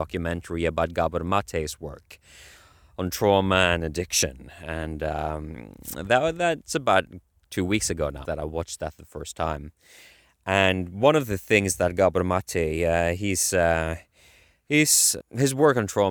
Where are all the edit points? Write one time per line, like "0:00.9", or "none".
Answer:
0:08.2
0:15.2